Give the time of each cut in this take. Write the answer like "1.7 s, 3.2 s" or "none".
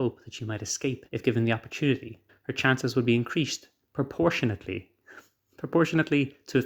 1.1 s, 2.3 s